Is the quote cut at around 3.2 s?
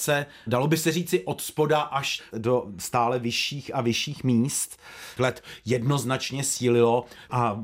no; 1 cut; at 5.2 s

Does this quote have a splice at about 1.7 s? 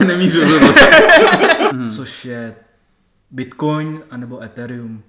yes; 1 cut; at 1.7 s

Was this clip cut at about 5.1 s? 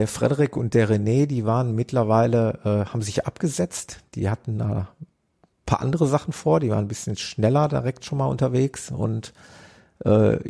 no; 0 cuts

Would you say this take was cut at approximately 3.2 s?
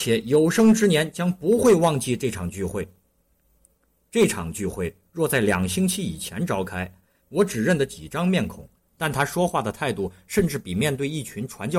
no; 2 cuts; at 7.2 s, 8.8 s

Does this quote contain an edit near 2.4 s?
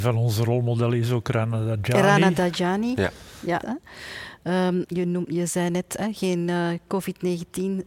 no; 2 cuts; at 3.6 s, 4.9 s

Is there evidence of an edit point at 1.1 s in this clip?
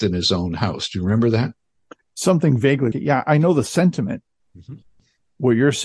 no; 2 cuts; at 2.9 s, 4.4 s

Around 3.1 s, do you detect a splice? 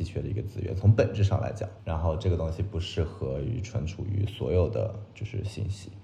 no; 0 cuts

